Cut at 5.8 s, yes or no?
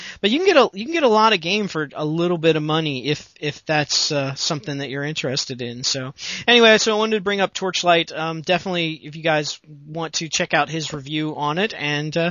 no